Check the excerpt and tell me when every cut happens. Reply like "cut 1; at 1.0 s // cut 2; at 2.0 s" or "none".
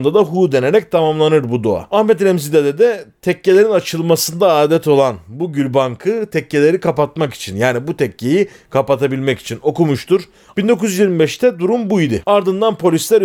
cut 1; at 10.5 s // cut 2; at 12.2 s

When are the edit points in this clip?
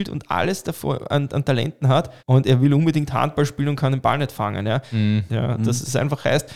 cut 1; at 2.2 s // cut 2; at 5.3 s

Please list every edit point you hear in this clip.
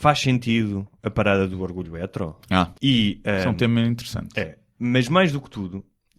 cut 1; at 2.8 s

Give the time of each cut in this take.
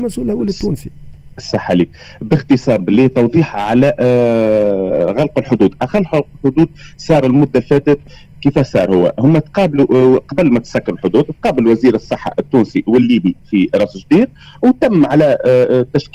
cut 1; at 1.3 s

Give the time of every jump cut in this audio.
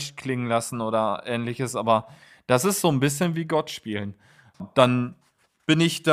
cut 1; at 4.5 s

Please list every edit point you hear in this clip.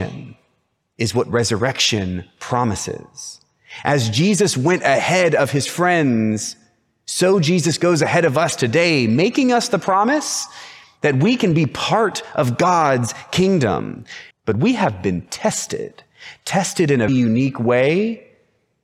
cut 1; at 14.3 s // cut 2; at 17.1 s

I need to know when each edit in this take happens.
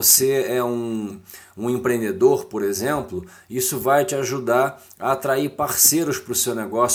none

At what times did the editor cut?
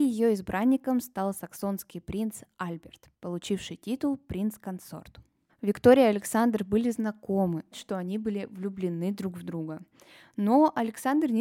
cut 1; at 5.5 s // cut 2; at 7.7 s

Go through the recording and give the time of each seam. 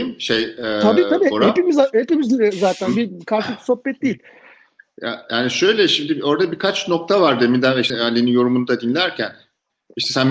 cut 1; at 7.9 s

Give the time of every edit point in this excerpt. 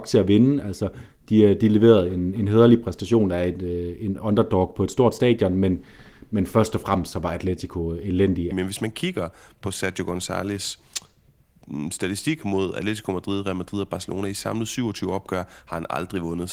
cut 1; at 8.5 s

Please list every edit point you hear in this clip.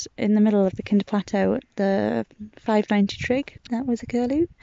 cut 1; at 3.7 s

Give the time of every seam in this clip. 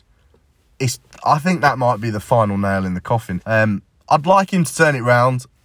cut 1; at 3.4 s

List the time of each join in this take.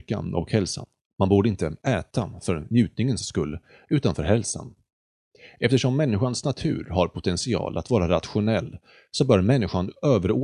none

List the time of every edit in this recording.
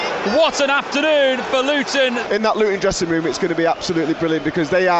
none

